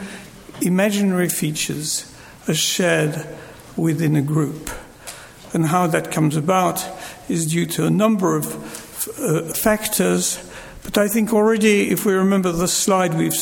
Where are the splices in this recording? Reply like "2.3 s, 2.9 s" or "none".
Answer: 9.5 s

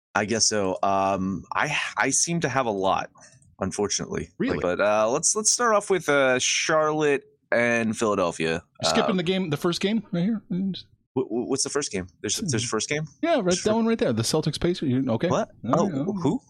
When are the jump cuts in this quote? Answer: 4.6 s

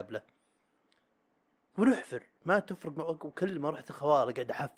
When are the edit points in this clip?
none

